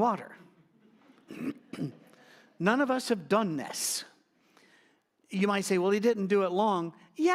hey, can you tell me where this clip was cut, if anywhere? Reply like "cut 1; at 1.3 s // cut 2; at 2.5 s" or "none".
none